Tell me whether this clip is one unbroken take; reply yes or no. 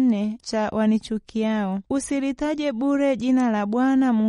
no